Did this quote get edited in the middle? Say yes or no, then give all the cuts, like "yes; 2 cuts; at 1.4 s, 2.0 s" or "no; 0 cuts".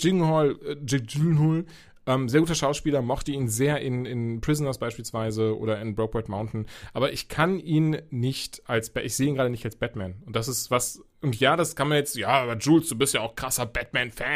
no; 0 cuts